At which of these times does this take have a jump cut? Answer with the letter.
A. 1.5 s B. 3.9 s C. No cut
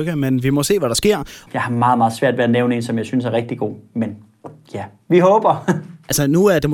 A